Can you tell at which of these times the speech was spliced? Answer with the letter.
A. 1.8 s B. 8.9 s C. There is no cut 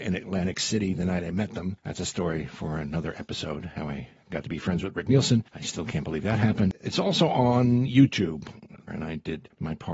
B